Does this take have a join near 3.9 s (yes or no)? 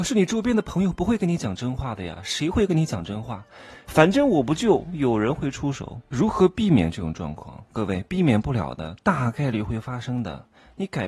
yes